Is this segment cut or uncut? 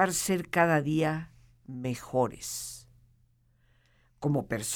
uncut